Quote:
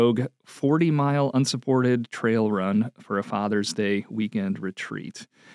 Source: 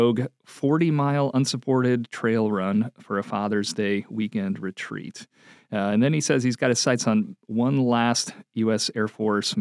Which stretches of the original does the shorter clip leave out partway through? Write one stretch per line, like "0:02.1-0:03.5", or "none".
none